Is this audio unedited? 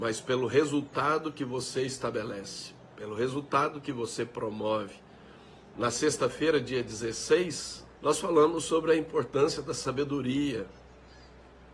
no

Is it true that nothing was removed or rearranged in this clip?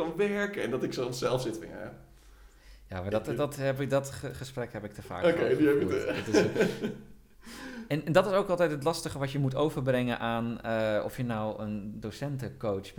yes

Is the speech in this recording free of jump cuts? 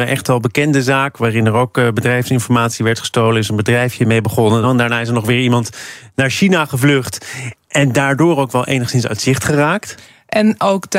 no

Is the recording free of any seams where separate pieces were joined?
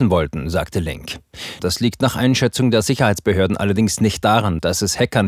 no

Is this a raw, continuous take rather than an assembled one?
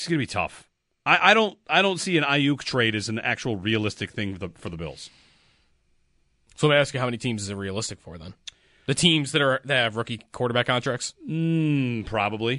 yes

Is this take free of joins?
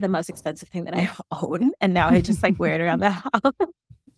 yes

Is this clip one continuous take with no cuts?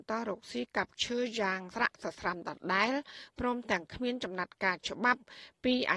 no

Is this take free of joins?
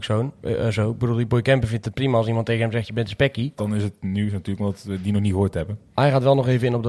no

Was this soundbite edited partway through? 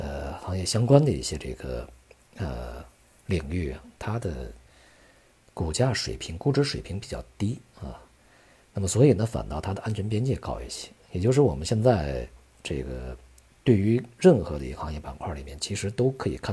no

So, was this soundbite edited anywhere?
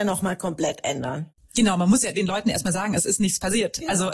no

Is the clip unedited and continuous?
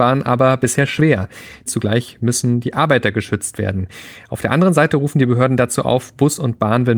no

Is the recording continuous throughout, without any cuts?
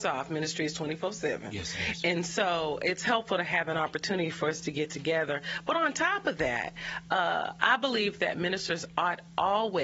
yes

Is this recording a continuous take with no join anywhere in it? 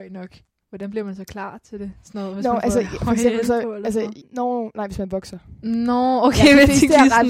no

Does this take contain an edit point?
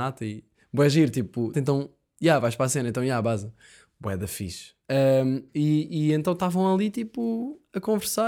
yes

